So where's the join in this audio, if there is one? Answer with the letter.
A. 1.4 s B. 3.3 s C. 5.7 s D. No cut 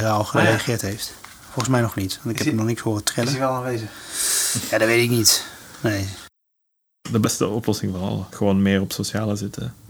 D